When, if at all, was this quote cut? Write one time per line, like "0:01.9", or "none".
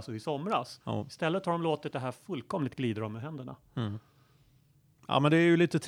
none